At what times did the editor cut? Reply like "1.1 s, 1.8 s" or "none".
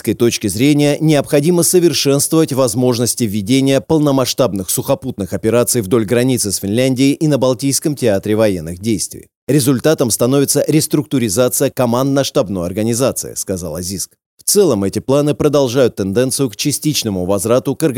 none